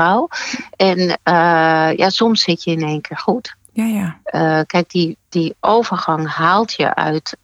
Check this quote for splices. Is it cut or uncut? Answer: uncut